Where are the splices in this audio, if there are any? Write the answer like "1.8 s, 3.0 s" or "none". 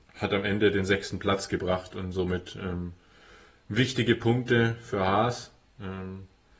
none

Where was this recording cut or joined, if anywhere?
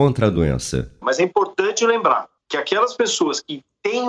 1.0 s

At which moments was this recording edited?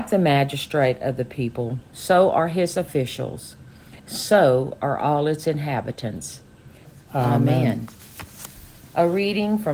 4.0 s, 6.8 s

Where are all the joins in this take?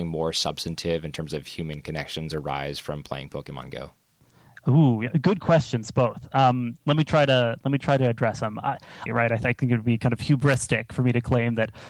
9.1 s

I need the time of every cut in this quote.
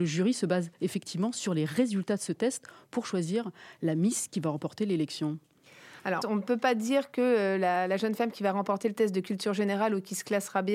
6.2 s

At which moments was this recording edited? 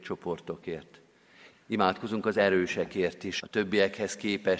1.5 s, 3.4 s

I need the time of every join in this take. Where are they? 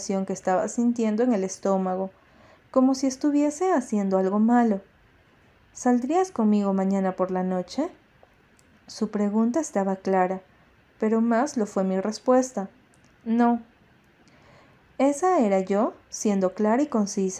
none

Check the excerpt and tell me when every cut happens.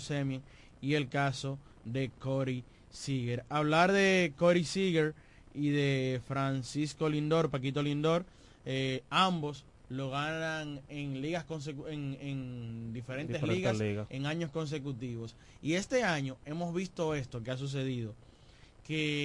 none

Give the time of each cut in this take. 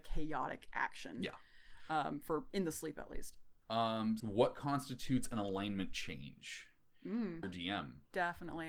4.2 s, 7.4 s

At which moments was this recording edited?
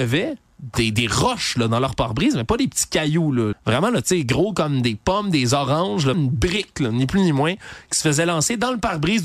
3.5 s, 6.1 s

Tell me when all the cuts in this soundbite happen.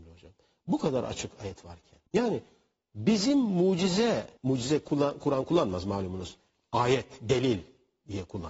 2.1 s, 4.4 s

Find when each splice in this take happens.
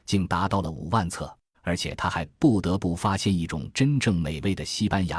1.5 s

